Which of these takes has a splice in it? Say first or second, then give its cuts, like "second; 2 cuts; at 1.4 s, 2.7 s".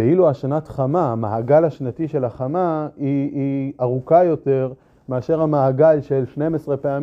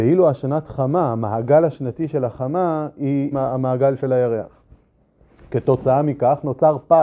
second; 1 cut; at 3.3 s